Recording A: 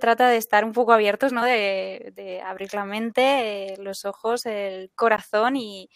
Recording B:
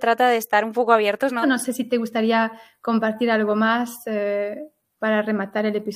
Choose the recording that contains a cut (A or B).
B